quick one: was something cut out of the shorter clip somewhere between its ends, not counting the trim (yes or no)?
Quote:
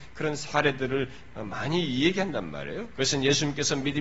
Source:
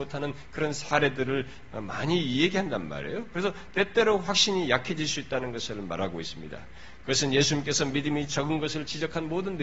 yes